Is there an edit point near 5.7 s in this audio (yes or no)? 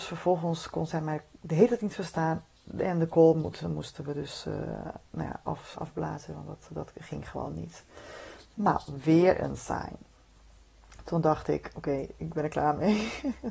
yes